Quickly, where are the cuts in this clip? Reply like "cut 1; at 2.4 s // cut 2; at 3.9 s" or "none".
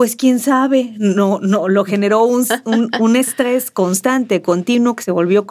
none